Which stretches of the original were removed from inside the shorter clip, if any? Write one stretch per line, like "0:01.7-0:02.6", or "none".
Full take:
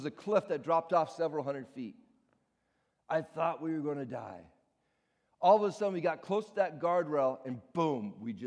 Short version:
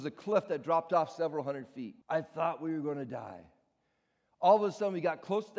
0:02.0-0:03.0